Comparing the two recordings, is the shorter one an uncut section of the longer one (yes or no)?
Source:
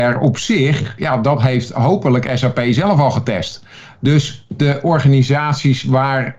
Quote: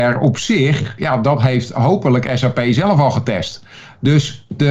yes